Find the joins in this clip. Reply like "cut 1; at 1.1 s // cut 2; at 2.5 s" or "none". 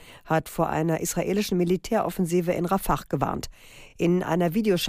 none